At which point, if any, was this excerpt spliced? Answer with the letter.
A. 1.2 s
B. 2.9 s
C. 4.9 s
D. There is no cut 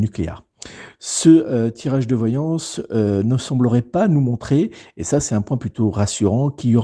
D